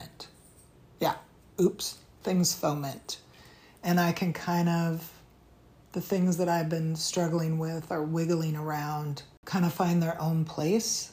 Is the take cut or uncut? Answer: uncut